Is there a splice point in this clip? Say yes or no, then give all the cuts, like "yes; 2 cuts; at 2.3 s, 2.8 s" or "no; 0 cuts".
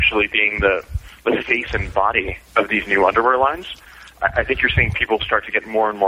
yes; 1 cut; at 2.4 s